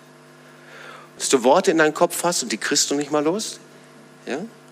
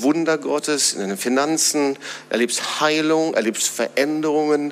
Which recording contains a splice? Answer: first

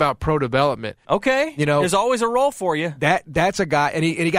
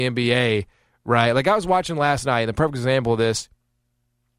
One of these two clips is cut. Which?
first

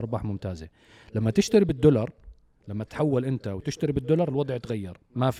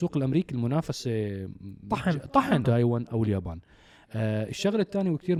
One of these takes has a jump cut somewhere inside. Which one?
second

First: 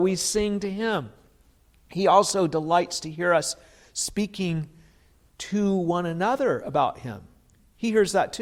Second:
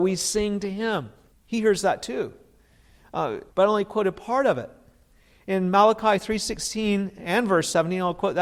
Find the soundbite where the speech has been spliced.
second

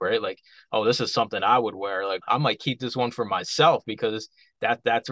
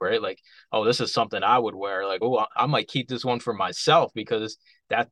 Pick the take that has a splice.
first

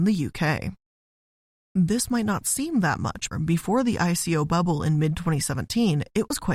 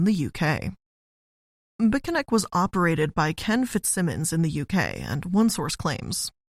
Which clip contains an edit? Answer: first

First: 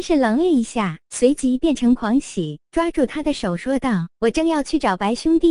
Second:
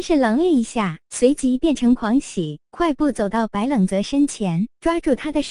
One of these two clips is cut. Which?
first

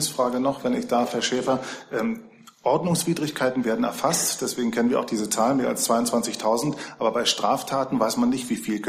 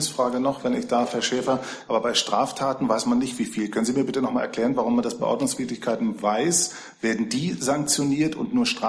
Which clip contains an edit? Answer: second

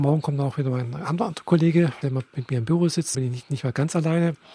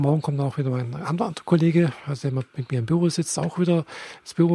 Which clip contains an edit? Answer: first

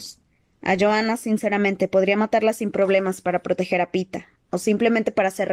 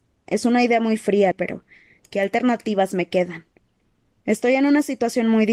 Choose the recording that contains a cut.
second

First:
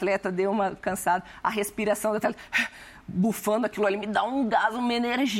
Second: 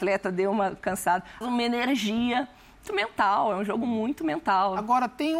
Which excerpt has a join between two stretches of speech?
second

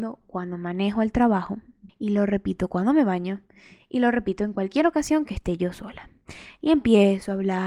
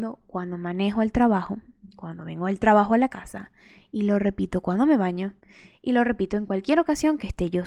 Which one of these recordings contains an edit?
first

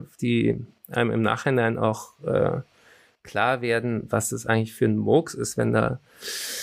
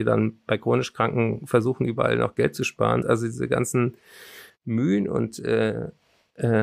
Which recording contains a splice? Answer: second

